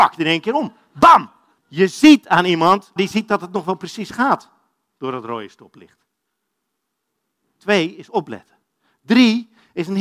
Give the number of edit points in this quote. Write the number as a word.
two